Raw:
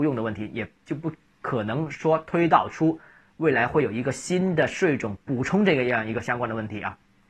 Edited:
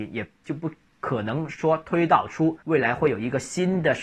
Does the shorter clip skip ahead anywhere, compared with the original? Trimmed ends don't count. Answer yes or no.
yes